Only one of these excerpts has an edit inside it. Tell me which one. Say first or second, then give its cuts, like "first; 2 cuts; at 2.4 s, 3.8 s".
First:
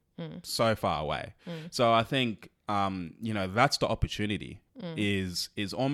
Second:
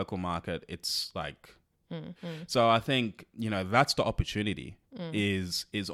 second; 2 cuts; at 2.1 s, 3.3 s